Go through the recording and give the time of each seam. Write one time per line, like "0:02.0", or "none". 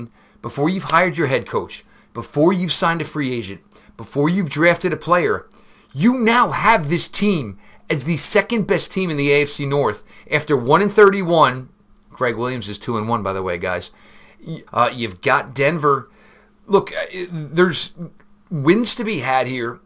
0:14.7

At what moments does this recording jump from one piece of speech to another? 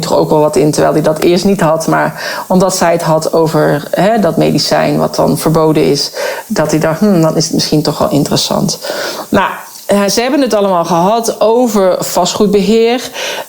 none

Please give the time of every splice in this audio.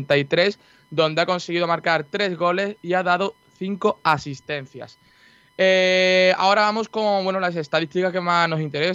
none

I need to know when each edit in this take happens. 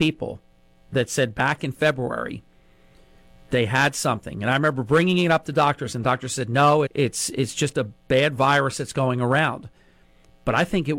0:06.9

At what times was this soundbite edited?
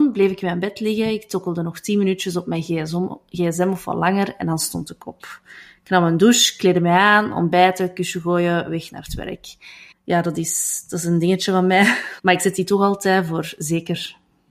0:09.9
0:12.2

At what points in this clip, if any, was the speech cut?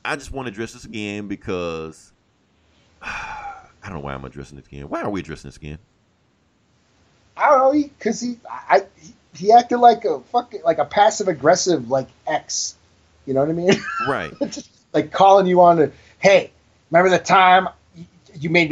none

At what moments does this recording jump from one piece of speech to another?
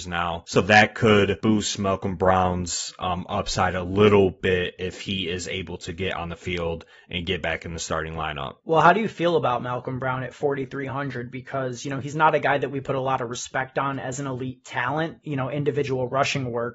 0:08.6
0:15.2

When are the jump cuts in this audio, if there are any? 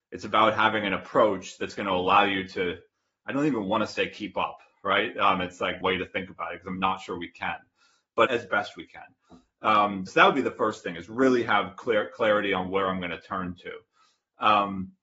0:05.8
0:08.3
0:10.1

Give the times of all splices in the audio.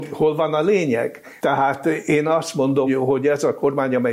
0:01.4
0:02.9

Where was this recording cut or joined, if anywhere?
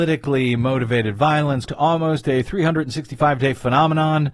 0:01.7

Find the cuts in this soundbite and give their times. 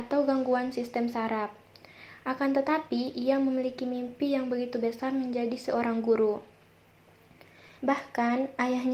0:07.8

